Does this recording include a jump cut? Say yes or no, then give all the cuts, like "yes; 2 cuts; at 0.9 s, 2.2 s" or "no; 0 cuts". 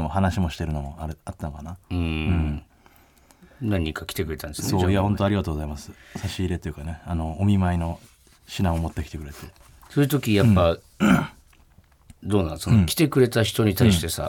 no; 0 cuts